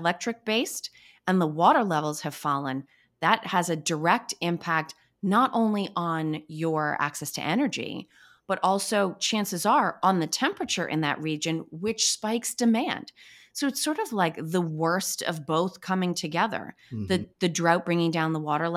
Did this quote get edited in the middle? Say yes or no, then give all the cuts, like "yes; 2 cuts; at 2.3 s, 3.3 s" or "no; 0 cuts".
no; 0 cuts